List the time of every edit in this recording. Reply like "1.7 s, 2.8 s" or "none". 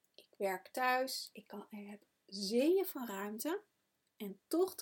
none